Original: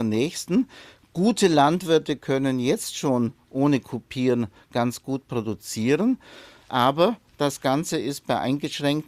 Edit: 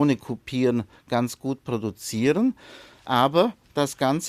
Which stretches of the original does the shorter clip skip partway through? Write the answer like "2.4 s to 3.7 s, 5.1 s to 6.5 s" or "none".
none